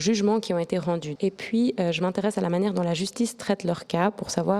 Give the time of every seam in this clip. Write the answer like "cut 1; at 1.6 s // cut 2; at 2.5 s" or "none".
cut 1; at 1.2 s

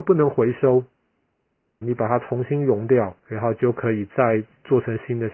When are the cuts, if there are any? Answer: cut 1; at 1.8 s // cut 2; at 3.2 s

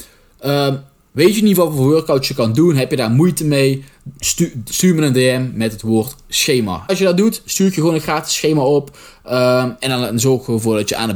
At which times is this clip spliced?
cut 1; at 4.2 s // cut 2; at 6.9 s

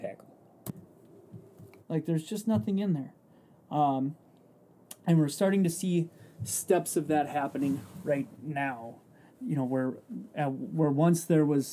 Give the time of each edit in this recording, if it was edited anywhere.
cut 1; at 1.8 s // cut 2; at 9.3 s

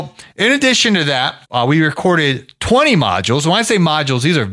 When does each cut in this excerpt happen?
cut 1; at 1.4 s

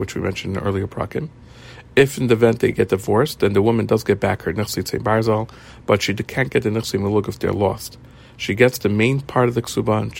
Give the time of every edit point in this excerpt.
none

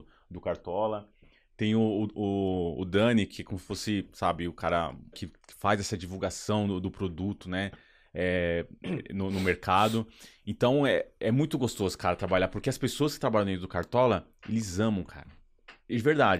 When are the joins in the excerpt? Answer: cut 1; at 5.1 s

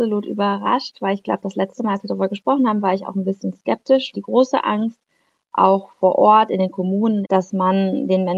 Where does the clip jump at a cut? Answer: cut 1; at 4.1 s // cut 2; at 7.2 s

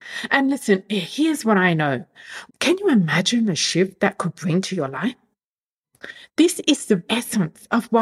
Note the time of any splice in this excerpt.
cut 1; at 2.5 s // cut 2; at 7.1 s

